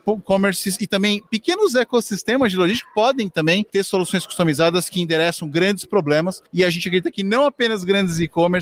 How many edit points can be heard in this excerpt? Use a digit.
0